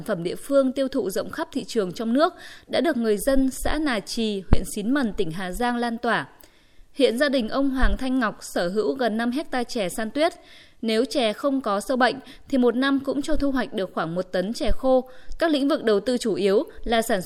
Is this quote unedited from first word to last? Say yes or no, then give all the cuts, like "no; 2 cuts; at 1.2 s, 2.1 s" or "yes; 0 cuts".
no; 1 cut; at 15.4 s